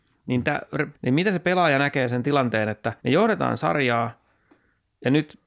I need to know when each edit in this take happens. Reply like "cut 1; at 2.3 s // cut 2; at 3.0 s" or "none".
cut 1; at 0.9 s // cut 2; at 3.0 s